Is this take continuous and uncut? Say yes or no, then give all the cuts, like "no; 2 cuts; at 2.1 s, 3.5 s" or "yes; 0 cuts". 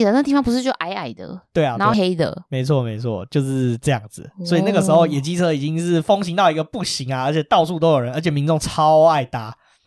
no; 1 cut; at 1.9 s